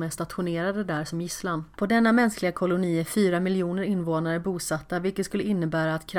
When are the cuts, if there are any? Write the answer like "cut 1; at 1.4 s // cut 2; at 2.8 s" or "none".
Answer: cut 1; at 1.8 s